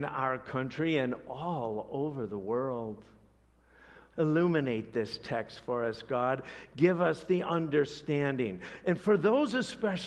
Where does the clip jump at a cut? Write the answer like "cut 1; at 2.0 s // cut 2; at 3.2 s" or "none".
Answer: cut 1; at 4.1 s